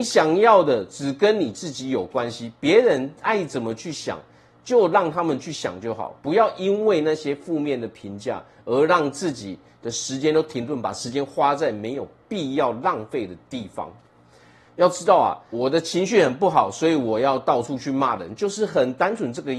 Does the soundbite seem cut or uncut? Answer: cut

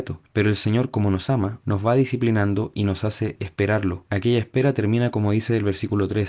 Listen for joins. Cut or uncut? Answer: cut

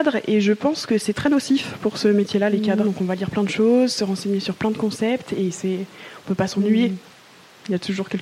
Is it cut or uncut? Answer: cut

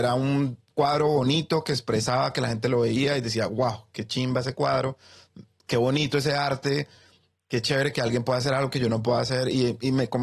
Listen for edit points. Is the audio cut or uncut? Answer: uncut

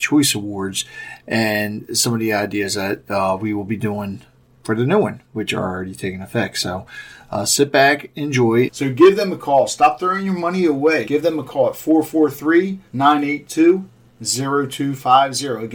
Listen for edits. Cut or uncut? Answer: cut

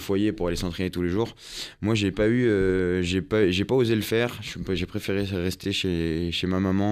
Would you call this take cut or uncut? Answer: uncut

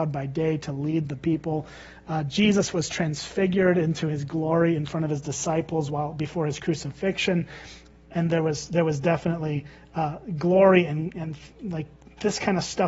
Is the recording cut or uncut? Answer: uncut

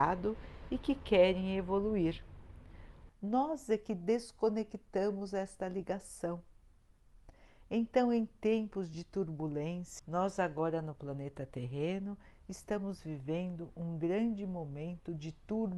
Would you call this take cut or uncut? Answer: cut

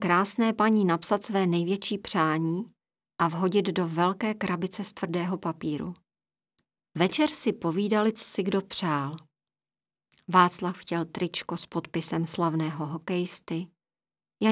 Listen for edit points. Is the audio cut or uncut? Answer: cut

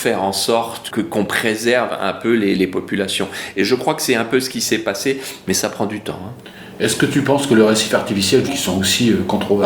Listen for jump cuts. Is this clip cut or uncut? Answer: cut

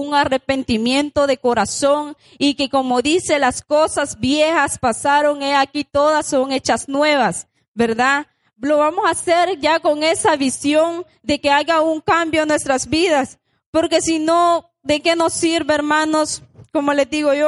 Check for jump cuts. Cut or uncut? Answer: uncut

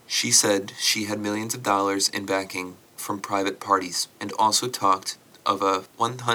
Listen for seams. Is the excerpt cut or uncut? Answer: cut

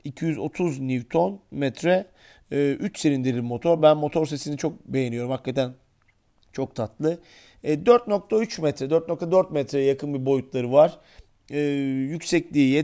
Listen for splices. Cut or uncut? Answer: uncut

